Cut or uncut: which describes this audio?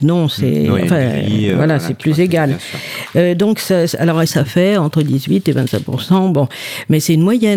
cut